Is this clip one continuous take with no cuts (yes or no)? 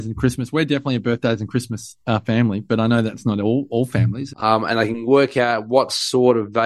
no